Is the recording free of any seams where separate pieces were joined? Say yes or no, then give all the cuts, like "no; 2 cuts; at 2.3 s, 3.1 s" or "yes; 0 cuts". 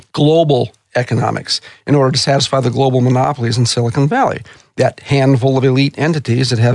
yes; 0 cuts